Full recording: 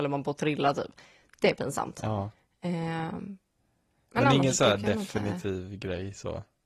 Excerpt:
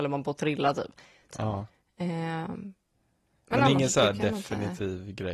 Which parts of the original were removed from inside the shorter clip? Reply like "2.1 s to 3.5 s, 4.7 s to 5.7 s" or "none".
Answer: 1.3 s to 1.9 s